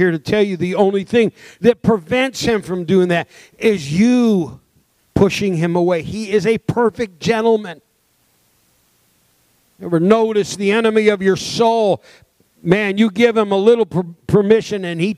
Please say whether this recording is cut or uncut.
uncut